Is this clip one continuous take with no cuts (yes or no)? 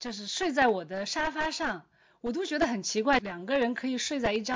yes